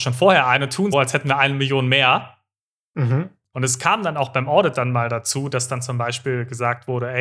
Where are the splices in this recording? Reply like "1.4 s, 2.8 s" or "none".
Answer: 0.9 s, 3.5 s